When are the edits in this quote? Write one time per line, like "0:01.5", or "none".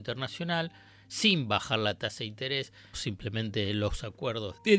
0:02.9